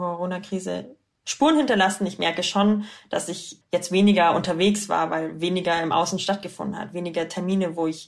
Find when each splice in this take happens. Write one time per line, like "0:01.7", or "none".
0:03.6